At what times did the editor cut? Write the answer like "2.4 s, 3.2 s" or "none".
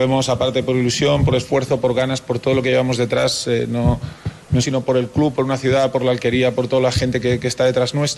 4.6 s

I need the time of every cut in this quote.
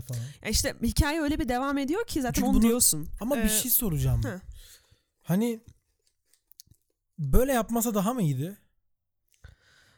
3.2 s

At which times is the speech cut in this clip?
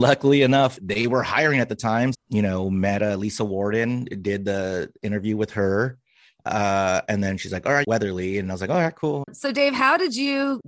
2.1 s, 7.8 s, 9.2 s

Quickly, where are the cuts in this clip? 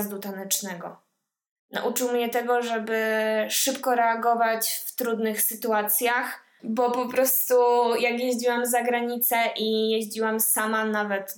6.6 s

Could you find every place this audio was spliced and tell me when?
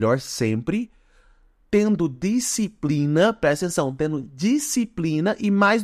none

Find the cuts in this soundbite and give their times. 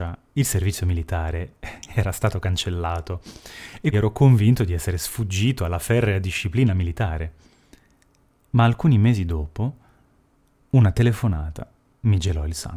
3.9 s

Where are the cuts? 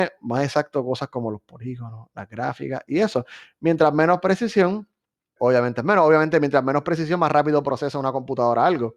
5.4 s

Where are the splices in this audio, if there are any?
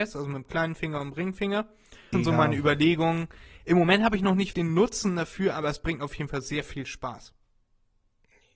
2.1 s, 4.5 s

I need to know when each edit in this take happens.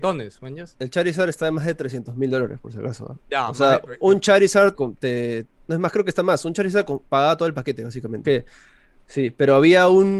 4.7 s, 8.2 s

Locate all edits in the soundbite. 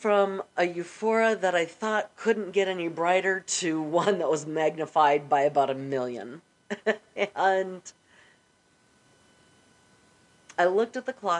none

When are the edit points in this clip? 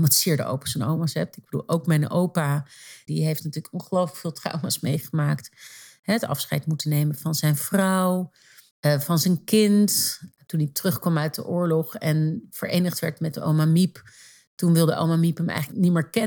3.1 s

